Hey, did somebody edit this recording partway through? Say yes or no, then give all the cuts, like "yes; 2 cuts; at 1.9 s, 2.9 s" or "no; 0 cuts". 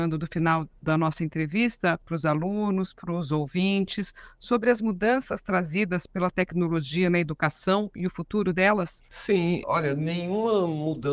yes; 2 cuts; at 2.0 s, 9.6 s